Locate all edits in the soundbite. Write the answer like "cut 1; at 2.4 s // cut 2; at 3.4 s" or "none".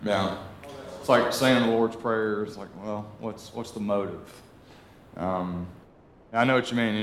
none